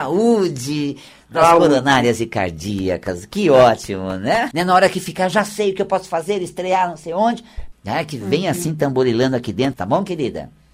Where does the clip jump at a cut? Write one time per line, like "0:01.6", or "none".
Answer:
0:04.5
0:07.7
0:09.7

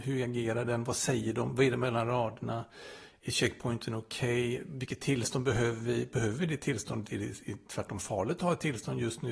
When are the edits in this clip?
none

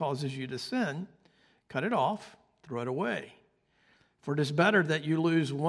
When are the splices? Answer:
none

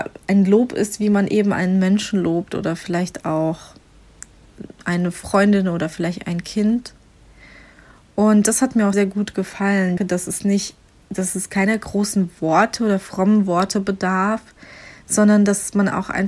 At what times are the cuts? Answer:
0:08.9
0:10.0

